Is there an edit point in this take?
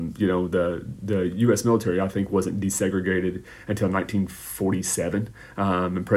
no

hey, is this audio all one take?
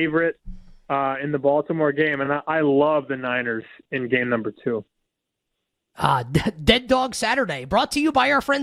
yes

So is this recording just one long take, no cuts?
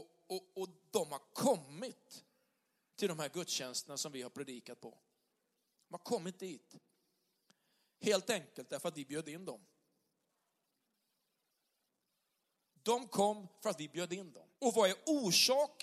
no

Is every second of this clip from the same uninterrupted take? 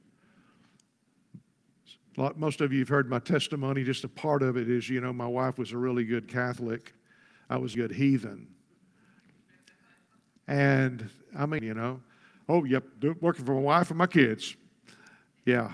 no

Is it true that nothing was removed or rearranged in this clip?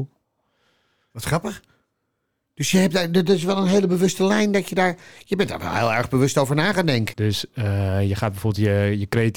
no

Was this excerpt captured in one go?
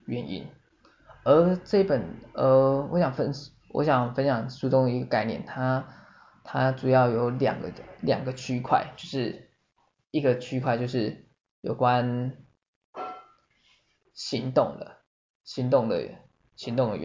yes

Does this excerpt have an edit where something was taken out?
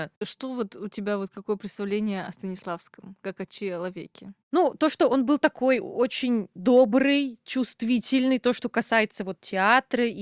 no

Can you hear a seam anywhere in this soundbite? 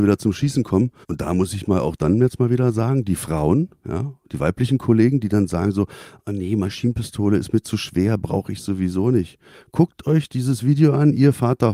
yes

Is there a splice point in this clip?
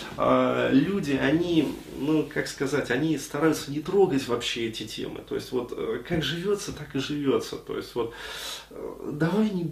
no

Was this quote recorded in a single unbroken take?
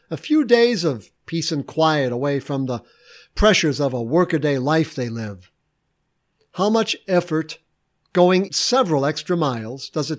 no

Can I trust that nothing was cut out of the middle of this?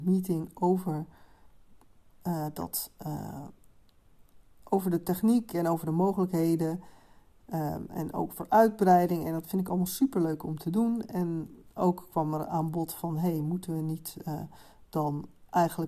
yes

